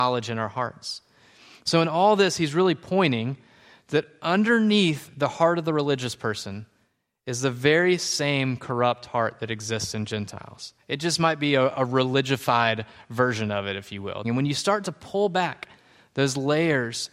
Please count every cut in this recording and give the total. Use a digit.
1